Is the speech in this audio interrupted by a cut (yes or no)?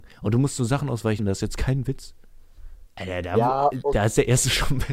yes